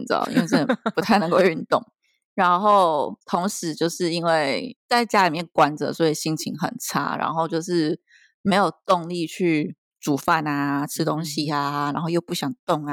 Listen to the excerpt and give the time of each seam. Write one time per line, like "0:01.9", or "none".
none